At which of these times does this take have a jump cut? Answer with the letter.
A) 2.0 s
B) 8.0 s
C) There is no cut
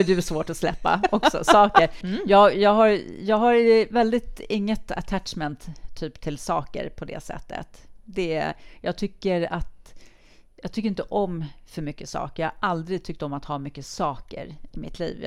A